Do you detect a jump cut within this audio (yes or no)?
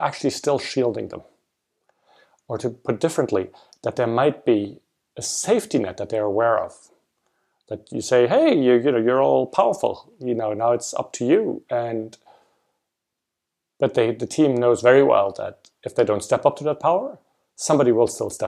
no